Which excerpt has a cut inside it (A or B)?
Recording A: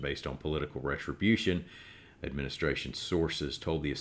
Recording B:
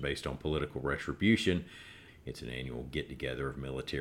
B